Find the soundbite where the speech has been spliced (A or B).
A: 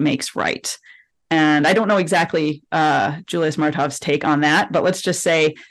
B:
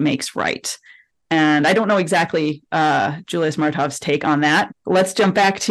B